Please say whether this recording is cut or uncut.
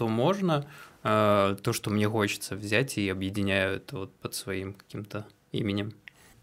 uncut